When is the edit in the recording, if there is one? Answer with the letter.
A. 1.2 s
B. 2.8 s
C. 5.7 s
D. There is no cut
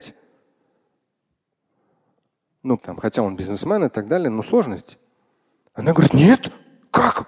B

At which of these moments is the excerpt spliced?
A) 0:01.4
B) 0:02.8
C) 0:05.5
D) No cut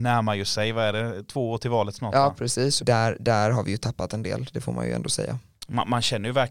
B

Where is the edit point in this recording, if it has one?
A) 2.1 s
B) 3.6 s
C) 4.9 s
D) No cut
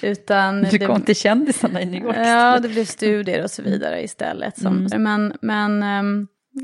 C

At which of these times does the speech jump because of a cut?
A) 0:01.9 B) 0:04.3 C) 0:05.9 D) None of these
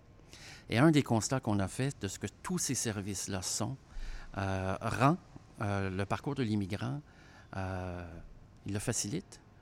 A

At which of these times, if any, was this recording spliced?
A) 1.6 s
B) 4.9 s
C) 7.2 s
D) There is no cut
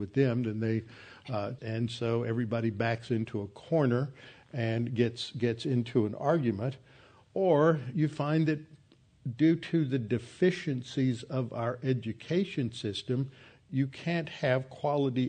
A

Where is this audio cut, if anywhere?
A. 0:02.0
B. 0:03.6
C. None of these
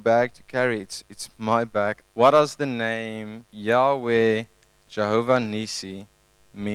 A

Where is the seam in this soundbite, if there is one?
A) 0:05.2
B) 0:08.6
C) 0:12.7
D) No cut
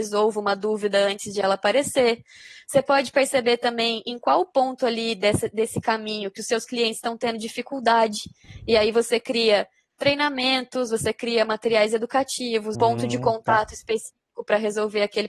C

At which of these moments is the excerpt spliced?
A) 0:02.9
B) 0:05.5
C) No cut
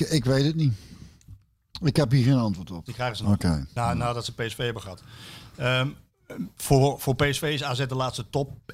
A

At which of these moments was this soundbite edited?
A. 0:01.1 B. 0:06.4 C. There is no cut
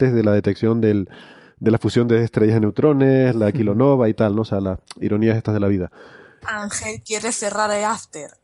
B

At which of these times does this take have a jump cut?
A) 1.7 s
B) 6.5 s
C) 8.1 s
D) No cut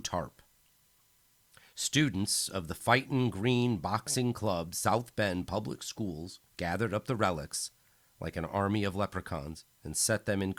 B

